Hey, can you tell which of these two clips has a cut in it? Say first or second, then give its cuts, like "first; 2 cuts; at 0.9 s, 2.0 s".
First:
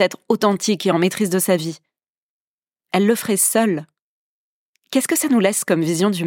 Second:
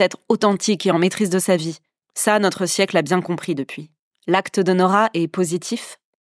second; 2 cuts; at 2.0 s, 4.1 s